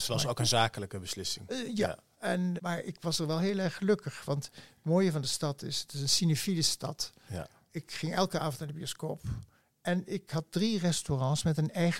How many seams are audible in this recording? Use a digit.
1